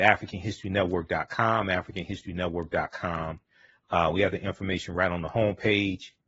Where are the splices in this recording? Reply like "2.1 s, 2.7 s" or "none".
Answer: none